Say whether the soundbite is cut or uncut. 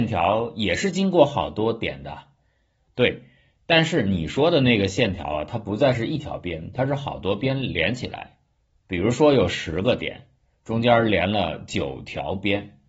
uncut